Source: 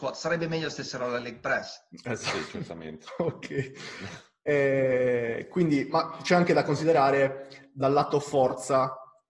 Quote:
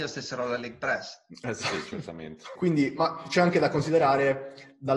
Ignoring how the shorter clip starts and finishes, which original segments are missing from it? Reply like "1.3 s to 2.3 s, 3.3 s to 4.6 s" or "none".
3.2 s to 5.5 s